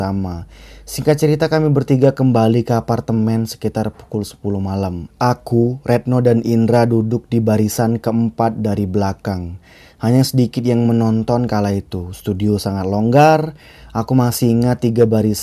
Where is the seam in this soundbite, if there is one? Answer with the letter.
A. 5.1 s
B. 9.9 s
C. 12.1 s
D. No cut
A